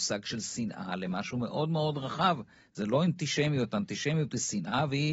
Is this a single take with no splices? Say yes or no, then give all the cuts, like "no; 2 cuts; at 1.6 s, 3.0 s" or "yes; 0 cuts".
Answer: yes; 0 cuts